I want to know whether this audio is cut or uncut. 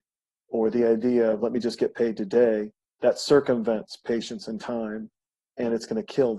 uncut